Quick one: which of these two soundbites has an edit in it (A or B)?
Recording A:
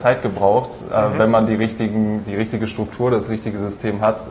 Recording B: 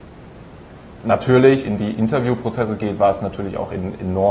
B